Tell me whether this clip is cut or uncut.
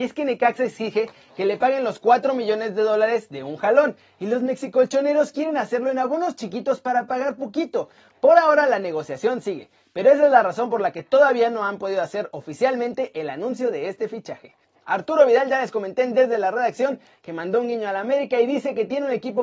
uncut